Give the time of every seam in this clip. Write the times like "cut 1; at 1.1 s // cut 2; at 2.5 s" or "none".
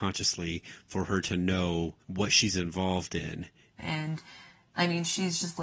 cut 1; at 2.0 s // cut 2; at 3.8 s